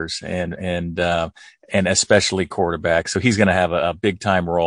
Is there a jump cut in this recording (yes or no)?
no